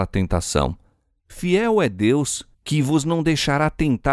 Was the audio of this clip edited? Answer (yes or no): yes